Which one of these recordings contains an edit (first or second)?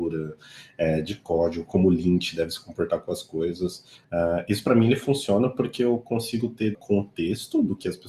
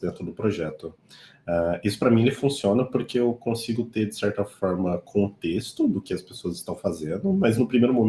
first